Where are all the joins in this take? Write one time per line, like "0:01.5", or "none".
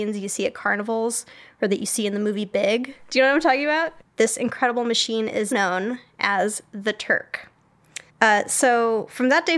0:04.0
0:05.5
0:08.1